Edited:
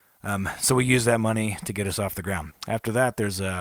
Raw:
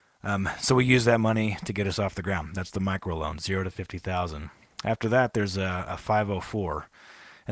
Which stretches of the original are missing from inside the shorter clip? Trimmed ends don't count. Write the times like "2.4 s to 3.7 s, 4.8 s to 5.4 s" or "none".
2.5 s to 4.7 s